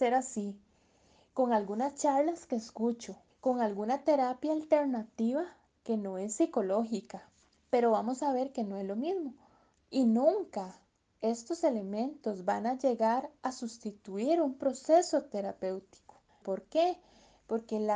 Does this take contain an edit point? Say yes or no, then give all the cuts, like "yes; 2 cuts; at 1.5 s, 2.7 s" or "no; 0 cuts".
yes; 2 cuts; at 3.3 s, 16.4 s